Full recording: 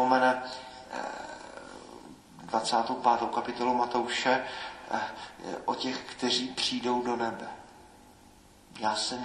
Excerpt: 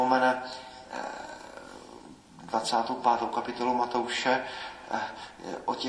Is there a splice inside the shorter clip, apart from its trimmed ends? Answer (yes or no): no